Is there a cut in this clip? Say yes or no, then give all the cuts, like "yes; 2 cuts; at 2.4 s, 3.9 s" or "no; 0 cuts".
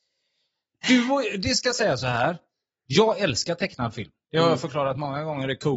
no; 0 cuts